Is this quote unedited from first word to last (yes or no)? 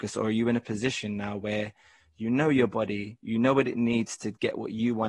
yes